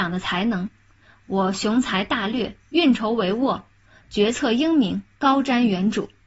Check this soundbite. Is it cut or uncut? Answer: uncut